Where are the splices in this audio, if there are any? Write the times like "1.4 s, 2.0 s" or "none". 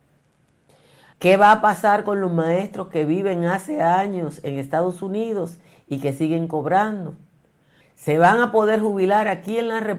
1.1 s, 7.8 s